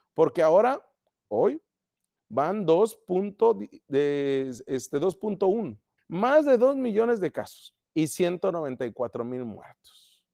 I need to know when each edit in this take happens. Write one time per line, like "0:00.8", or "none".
0:06.0
0:07.8